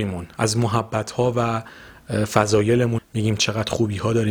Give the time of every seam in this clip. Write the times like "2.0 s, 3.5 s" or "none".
3.0 s